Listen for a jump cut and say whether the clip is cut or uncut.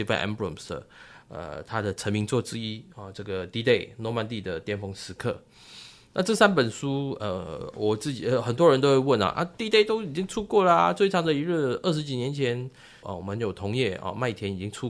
uncut